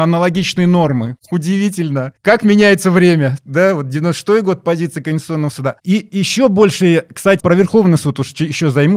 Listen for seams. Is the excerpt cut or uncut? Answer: cut